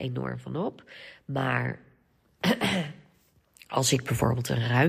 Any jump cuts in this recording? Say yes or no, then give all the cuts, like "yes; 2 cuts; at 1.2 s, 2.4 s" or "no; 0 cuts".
no; 0 cuts